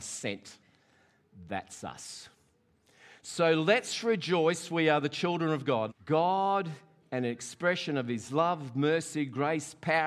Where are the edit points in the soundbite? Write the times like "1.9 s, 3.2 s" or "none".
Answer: 5.9 s